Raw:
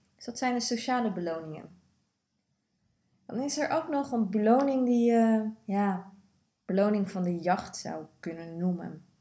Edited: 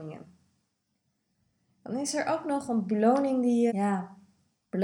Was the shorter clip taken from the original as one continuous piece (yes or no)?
no